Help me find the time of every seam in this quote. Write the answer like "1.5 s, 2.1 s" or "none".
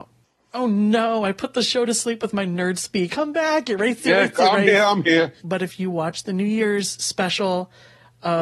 3.1 s, 5.4 s